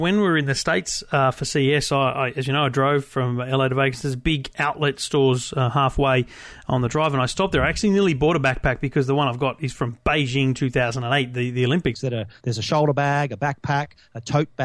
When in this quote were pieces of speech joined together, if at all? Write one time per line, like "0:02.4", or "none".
0:11.9